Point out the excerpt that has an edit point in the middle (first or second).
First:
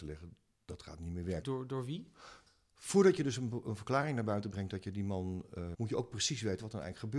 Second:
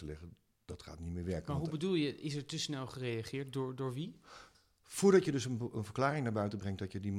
first